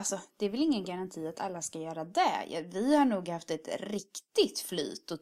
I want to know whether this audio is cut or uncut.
uncut